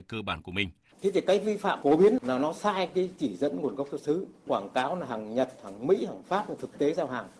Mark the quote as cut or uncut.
cut